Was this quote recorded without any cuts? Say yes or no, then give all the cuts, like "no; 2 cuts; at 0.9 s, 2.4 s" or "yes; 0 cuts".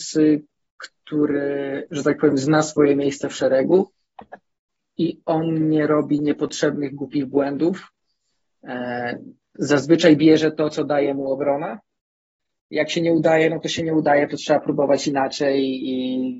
yes; 0 cuts